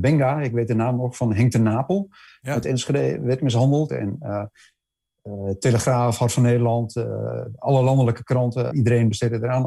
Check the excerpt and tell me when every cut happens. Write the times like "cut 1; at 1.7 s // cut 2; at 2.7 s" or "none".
cut 1; at 3.9 s // cut 2; at 8.7 s